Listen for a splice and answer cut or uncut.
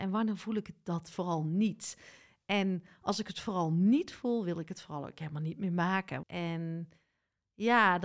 cut